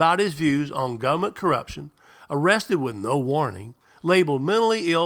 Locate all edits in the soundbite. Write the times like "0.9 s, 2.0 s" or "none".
none